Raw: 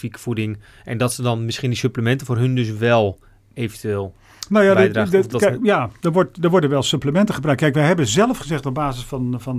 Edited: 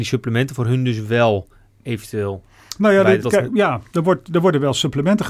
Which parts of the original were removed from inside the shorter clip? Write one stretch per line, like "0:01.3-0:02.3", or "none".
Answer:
0:04.9-0:05.3